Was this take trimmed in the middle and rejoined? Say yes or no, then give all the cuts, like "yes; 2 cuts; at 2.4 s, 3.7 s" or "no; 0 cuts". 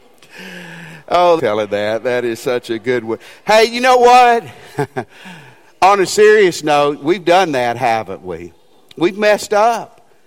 yes; 1 cut; at 1.4 s